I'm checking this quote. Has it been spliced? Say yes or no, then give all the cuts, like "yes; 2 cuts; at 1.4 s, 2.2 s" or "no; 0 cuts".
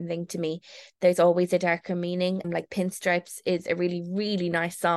yes; 1 cut; at 2.4 s